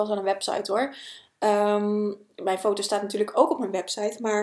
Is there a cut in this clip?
no; 0 cuts

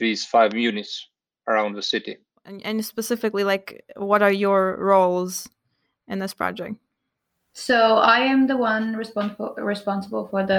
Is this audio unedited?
yes; 0 cuts

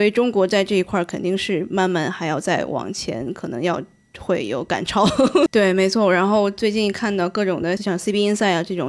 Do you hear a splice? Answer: yes; 2 cuts; at 5.5 s, 7.8 s

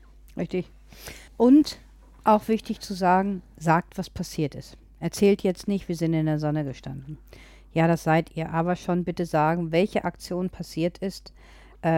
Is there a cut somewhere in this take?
yes; 1 cut; at 1.3 s

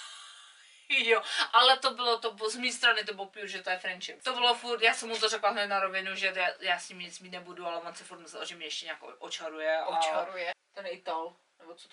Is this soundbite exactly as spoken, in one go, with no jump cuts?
no; 2 cuts; at 4.2 s, 10.5 s

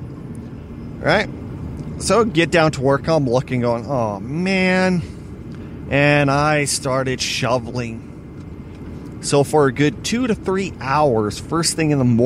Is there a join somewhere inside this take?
no; 0 cuts

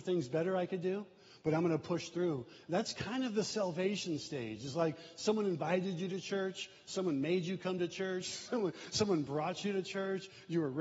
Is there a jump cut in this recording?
no; 0 cuts

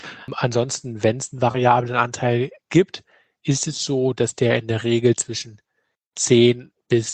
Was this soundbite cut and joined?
no; 0 cuts

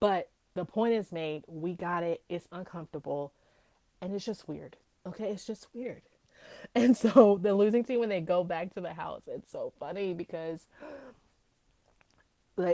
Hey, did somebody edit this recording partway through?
no; 0 cuts

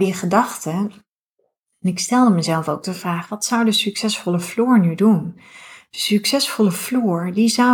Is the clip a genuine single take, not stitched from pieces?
yes; 0 cuts

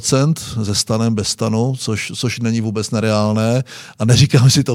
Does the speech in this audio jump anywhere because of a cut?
no; 0 cuts

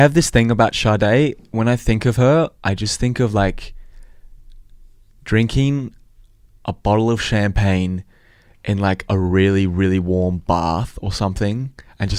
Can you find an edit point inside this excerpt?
no; 0 cuts

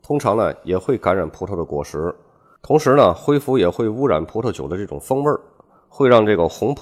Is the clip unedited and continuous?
yes; 0 cuts

